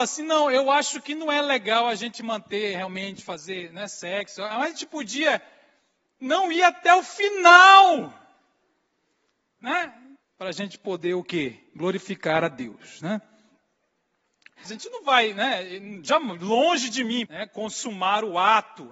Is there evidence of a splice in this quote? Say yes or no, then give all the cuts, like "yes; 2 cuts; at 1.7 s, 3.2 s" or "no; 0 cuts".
yes; 3 cuts; at 10.2 s, 14.6 s, 17.3 s